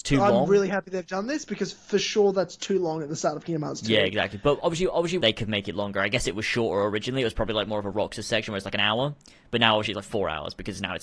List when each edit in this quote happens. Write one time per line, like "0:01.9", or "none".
0:05.2